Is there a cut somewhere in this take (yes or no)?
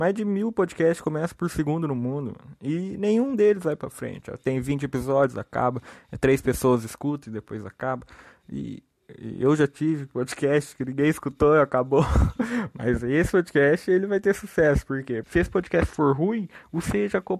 yes